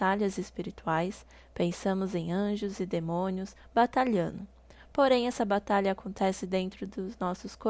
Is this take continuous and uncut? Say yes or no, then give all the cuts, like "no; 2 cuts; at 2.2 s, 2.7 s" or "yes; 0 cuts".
yes; 0 cuts